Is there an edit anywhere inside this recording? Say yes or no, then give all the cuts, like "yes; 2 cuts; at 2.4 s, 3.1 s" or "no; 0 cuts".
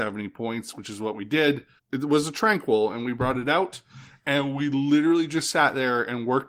yes; 1 cut; at 1.8 s